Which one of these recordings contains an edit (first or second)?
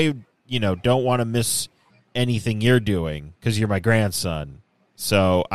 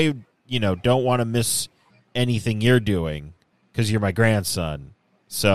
first